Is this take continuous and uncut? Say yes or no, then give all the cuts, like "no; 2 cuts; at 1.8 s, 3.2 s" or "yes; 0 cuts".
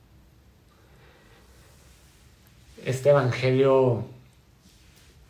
yes; 0 cuts